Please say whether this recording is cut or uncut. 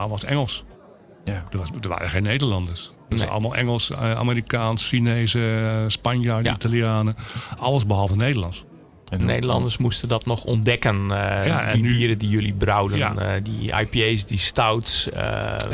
uncut